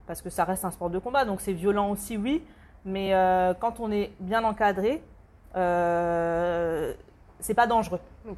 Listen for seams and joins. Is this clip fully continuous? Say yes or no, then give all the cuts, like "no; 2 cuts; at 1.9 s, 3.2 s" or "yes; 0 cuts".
yes; 0 cuts